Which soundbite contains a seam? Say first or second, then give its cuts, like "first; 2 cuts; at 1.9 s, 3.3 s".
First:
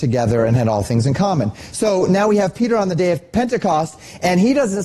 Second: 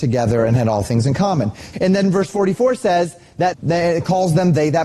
second; 2 cuts; at 1.7 s, 3.5 s